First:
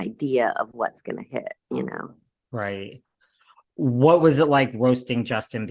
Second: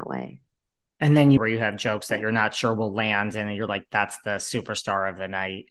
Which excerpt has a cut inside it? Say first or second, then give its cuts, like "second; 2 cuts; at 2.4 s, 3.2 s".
second; 1 cut; at 1.4 s